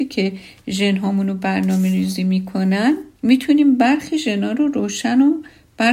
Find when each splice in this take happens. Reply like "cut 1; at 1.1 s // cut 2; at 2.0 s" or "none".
cut 1; at 3.2 s